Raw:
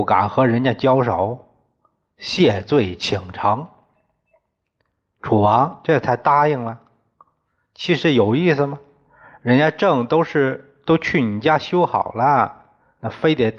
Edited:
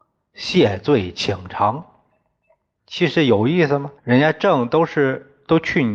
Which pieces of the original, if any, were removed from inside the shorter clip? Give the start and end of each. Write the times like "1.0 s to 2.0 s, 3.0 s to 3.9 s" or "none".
4.6 s to 7.7 s, 8.9 s to 9.4 s